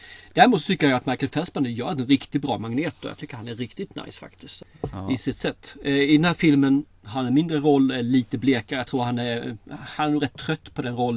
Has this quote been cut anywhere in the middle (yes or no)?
no